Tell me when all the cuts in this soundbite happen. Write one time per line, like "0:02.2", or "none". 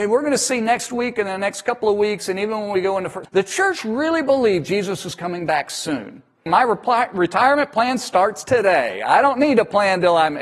0:03.2
0:06.5

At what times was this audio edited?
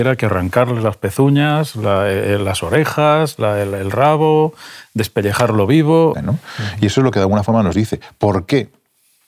0:06.1

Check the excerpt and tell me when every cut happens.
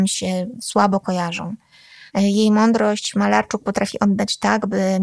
0:02.1

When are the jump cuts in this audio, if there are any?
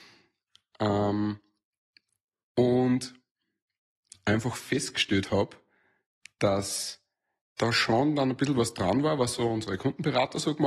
none

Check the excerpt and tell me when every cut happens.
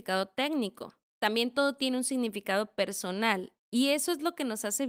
0:01.1

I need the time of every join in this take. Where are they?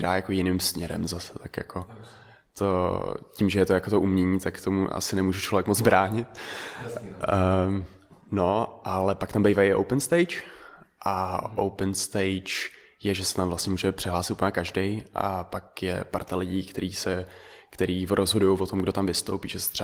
none

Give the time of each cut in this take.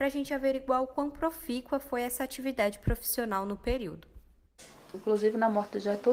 0:04.9

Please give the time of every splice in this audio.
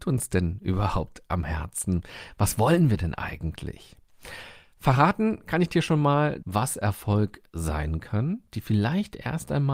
0:06.4

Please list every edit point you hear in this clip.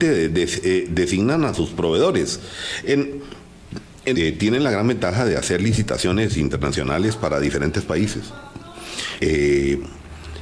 0:04.1
0:09.2

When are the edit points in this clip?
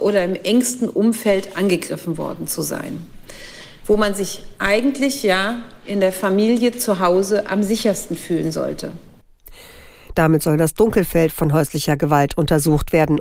0:10.1

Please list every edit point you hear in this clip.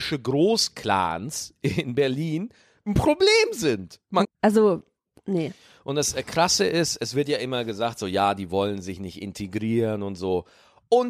0:04.2

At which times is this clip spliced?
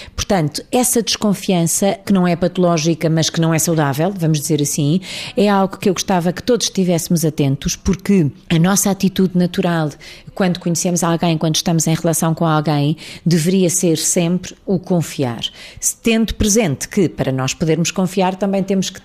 0:08.4

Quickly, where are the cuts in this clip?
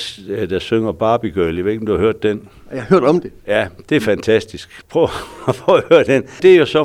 none

